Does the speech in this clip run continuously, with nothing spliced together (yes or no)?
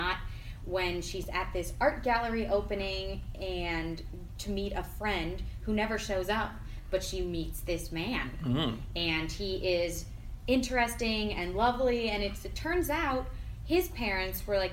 yes